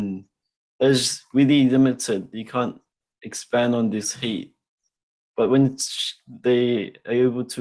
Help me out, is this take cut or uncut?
uncut